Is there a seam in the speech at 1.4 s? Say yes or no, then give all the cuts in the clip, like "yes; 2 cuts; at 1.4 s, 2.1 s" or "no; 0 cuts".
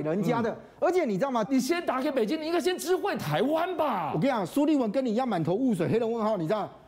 yes; 1 cut; at 1.4 s